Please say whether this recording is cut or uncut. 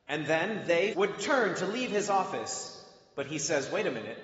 cut